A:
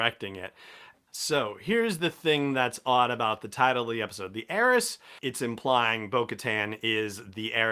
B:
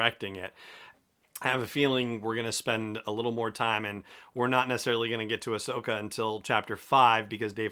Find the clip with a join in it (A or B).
A